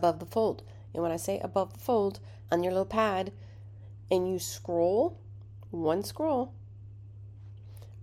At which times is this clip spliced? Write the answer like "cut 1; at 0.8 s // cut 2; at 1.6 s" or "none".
cut 1; at 2.5 s